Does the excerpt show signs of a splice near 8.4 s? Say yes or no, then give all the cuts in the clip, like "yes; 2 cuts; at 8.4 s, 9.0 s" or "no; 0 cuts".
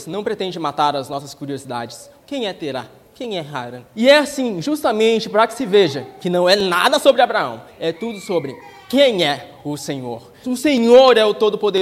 no; 3 cuts; at 2.2 s, 3.9 s, 10.4 s